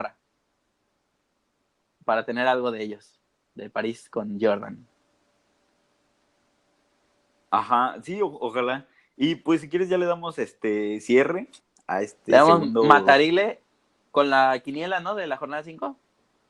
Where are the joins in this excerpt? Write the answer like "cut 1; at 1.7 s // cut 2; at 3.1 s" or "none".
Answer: none

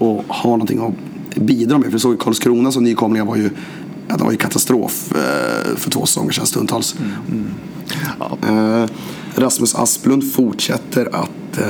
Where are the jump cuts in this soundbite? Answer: cut 1; at 7.3 s // cut 2; at 8.4 s

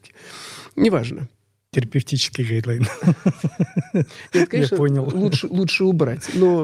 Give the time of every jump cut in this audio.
cut 1; at 1.7 s

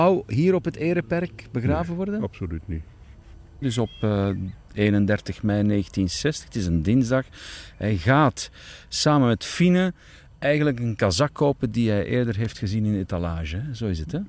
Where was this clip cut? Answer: cut 1; at 3.6 s

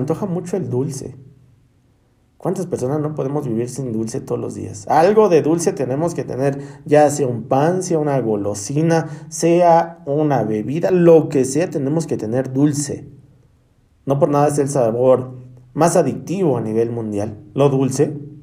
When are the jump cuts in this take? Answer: none

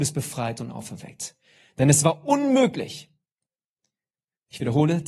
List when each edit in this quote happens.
none

